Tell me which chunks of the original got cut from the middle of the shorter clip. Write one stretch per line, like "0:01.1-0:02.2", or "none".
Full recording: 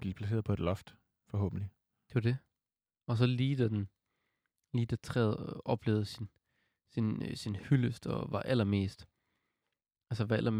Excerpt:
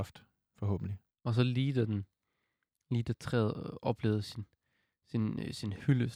0:01.8-0:02.9